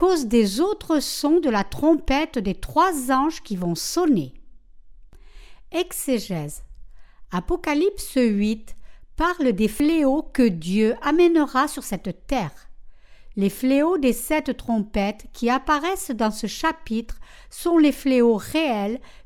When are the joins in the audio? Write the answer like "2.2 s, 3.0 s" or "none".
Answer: 13.3 s

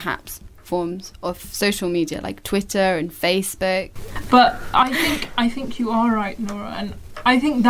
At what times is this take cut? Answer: none

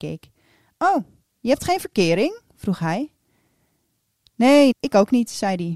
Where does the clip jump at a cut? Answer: 4.7 s

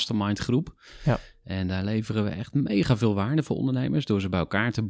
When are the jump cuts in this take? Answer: none

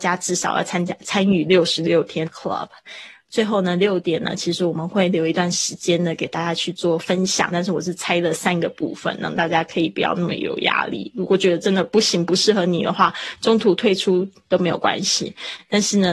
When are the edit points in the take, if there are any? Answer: 2.3 s, 7.5 s

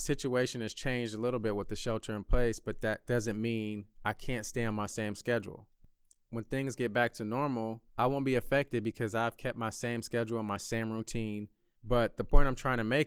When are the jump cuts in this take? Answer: 6.2 s, 7.9 s, 11.7 s

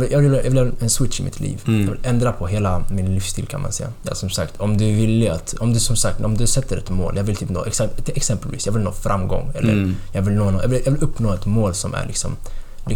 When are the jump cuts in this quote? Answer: 4.0 s

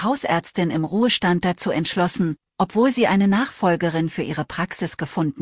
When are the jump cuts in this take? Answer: 2.5 s

